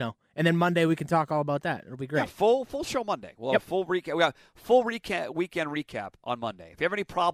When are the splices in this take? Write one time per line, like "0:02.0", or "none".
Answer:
none